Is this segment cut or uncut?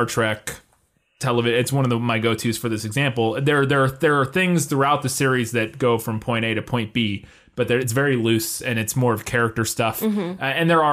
uncut